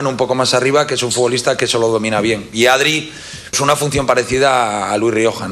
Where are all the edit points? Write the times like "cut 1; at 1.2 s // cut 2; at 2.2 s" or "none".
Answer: cut 1; at 3.5 s